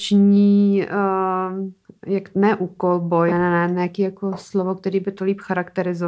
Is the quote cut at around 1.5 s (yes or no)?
no